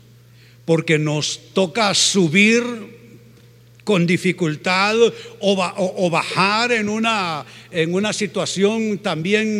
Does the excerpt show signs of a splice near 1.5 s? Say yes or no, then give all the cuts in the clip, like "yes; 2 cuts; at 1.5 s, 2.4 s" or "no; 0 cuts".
yes; 1 cut; at 1.5 s